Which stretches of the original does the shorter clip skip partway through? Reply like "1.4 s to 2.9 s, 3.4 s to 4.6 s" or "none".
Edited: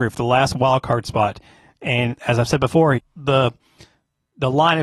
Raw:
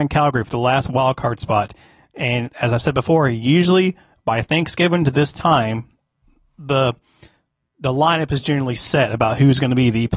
3.3 s to 6.4 s